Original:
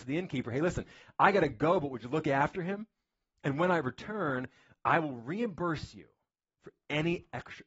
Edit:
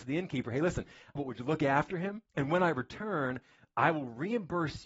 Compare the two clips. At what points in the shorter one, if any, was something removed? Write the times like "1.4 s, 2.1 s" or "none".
1.2 s, 2.3 s